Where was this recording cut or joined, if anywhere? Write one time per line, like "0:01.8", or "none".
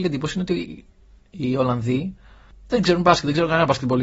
none

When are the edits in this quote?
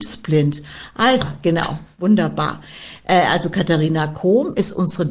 0:01.2

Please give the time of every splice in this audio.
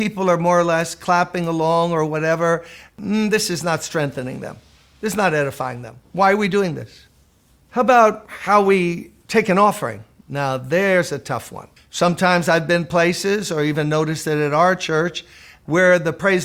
0:11.8

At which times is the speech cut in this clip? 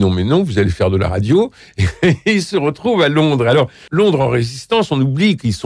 0:03.9

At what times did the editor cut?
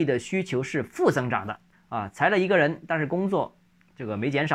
0:01.7

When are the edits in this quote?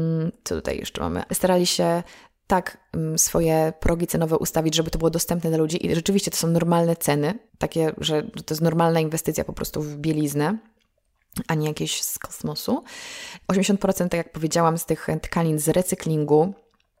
0:01.3
0:07.5
0:13.4

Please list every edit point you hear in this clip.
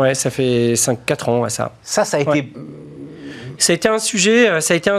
none

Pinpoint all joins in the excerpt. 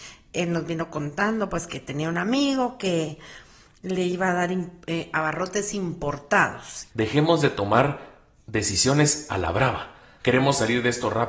0:06.9
0:10.2

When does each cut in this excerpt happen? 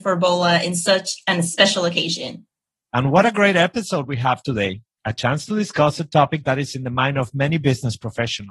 none

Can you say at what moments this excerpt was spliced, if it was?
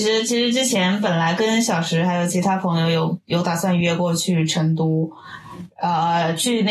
none

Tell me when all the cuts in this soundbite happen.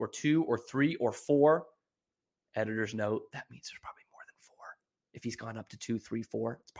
none

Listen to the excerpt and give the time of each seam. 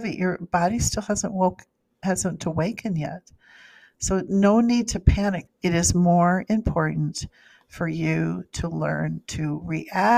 0:05.5

